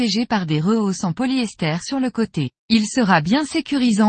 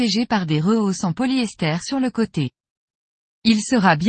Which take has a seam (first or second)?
first